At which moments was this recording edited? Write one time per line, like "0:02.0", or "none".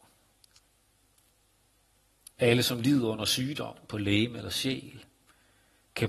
0:02.3